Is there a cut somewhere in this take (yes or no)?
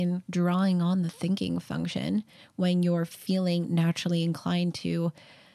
no